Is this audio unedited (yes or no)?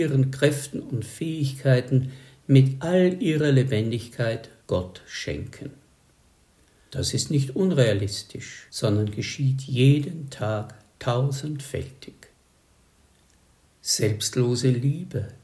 yes